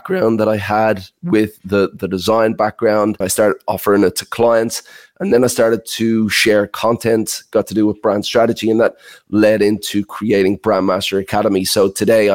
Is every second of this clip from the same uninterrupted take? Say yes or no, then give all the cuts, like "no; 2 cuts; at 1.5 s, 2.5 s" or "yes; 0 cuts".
no; 1 cut; at 3.2 s